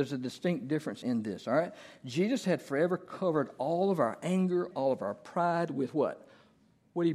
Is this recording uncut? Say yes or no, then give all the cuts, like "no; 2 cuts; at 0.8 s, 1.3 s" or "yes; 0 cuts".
no; 2 cuts; at 1.0 s, 4.7 s